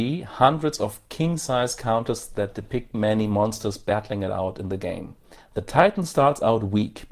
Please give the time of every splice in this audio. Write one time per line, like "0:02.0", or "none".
0:02.9
0:05.4